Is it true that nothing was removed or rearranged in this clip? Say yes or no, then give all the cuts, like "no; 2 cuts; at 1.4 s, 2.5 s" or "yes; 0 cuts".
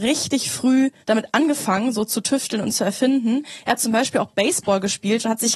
no; 1 cut; at 1.0 s